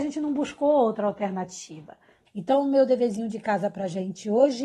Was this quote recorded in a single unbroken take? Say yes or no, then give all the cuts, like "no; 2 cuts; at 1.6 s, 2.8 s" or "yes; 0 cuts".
no; 1 cut; at 2.3 s